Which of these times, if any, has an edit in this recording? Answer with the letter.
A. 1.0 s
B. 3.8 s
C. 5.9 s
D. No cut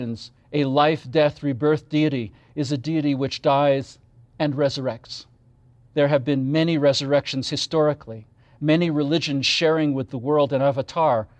C